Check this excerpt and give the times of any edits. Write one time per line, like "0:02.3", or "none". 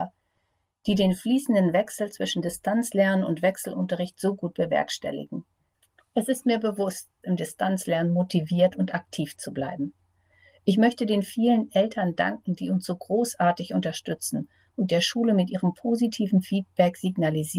0:07.2